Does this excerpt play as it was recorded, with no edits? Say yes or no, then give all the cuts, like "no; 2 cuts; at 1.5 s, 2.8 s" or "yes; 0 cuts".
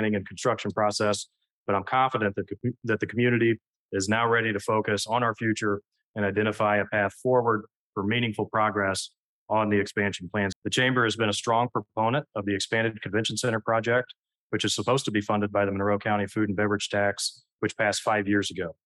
no; 1 cut; at 10.5 s